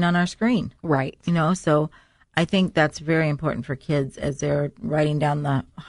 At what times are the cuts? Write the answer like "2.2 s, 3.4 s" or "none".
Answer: none

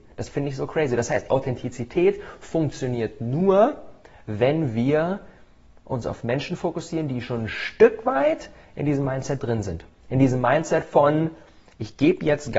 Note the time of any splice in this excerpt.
none

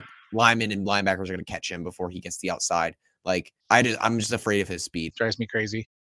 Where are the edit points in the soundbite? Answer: 3.6 s, 5.1 s

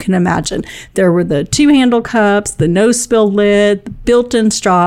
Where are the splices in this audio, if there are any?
none

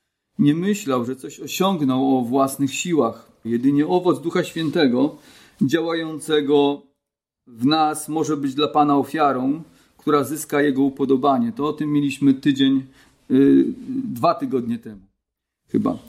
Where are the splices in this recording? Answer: 3.4 s

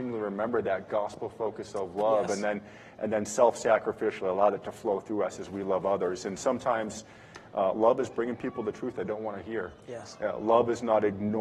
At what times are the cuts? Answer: none

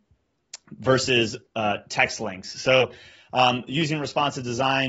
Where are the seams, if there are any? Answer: none

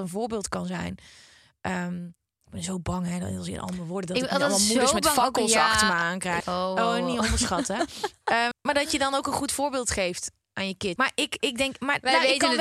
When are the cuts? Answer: 6.4 s, 8.5 s, 11.0 s

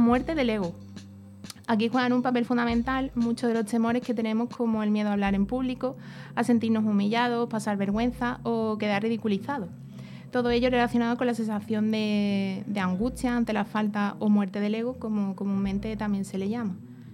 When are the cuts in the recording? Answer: none

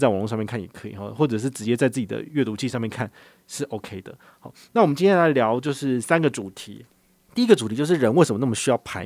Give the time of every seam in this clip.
none

